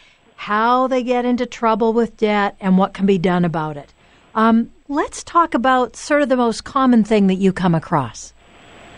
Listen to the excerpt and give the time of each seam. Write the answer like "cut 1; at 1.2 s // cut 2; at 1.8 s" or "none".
cut 1; at 4.8 s